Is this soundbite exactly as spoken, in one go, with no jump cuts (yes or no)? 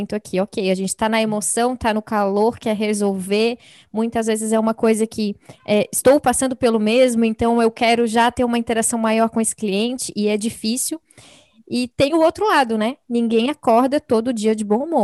yes